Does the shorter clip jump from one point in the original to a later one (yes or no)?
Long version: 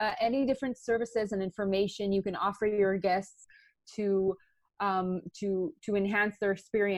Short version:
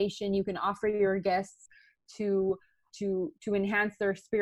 yes